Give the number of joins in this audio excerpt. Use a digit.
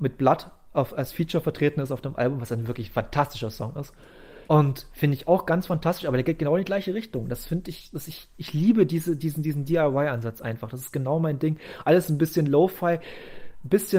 1